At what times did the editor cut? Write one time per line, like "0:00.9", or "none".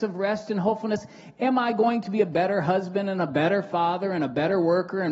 none